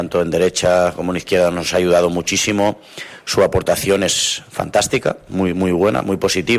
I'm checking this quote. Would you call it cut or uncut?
uncut